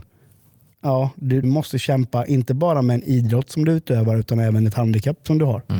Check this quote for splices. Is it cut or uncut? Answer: cut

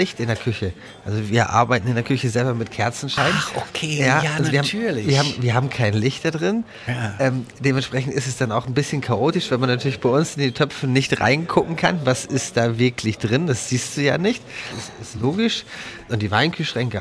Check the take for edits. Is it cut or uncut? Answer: cut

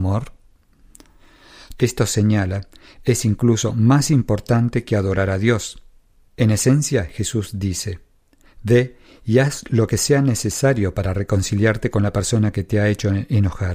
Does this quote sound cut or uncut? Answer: cut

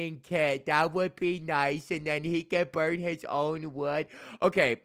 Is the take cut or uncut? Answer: uncut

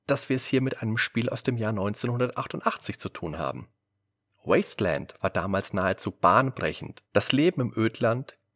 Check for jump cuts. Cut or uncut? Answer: cut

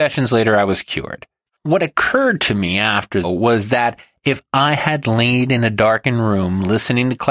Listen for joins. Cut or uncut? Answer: cut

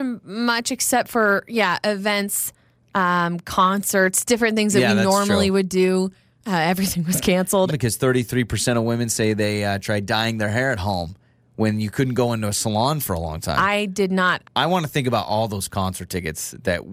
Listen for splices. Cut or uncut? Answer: cut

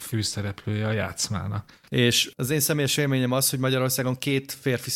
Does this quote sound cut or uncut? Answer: cut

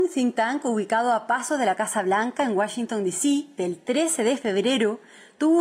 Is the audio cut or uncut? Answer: cut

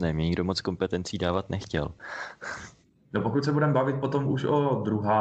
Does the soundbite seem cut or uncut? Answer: uncut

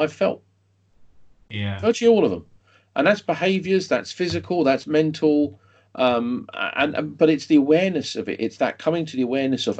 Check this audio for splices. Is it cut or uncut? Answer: uncut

